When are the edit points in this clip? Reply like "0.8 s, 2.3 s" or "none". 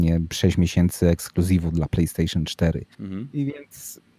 2.9 s